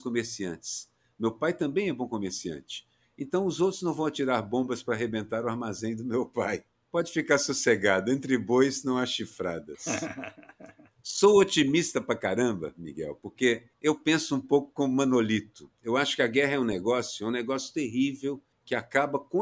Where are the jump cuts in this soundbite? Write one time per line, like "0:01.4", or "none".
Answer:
none